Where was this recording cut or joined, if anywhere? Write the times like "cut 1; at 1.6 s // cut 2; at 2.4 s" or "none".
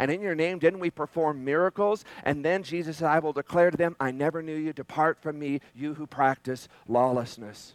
none